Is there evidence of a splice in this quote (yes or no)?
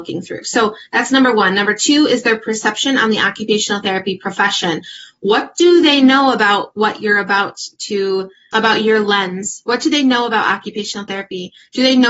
yes